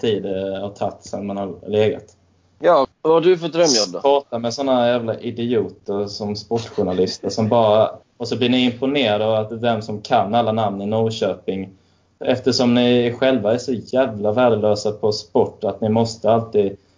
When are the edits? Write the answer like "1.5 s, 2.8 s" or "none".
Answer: 2.8 s, 8.0 s